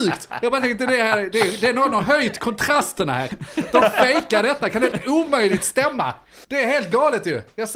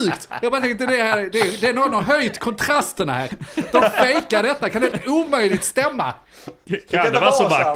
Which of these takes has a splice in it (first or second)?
first